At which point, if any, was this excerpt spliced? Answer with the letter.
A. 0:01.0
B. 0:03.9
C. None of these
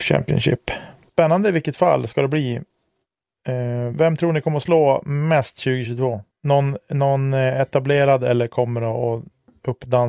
B